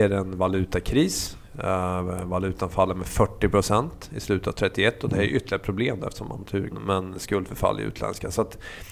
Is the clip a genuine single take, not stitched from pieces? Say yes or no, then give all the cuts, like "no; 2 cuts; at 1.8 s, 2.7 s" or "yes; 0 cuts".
no; 1 cut; at 6.7 s